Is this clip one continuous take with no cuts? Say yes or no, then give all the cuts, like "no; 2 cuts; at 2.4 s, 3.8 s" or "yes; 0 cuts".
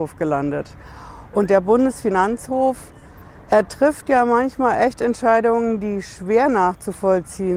yes; 0 cuts